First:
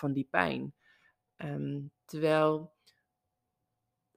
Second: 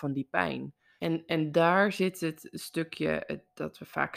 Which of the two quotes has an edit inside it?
second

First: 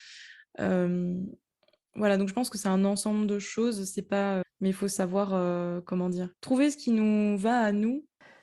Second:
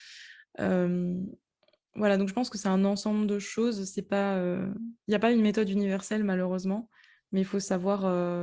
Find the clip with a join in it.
first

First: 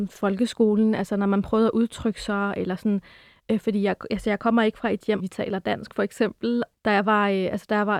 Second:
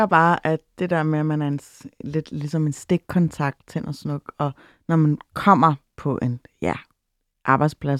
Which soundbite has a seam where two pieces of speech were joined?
first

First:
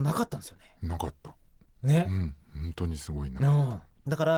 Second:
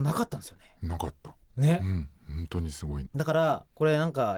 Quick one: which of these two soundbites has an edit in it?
second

